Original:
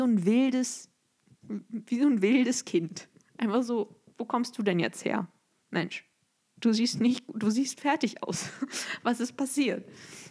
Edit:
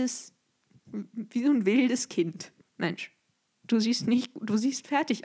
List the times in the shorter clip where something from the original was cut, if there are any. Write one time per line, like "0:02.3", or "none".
0:02.6